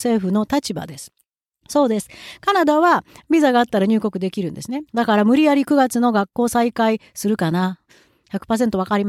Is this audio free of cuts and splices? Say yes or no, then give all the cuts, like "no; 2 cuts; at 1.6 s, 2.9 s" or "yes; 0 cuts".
no; 1 cut; at 4.9 s